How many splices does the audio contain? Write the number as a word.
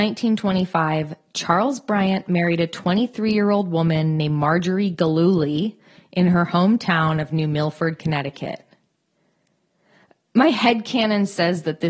zero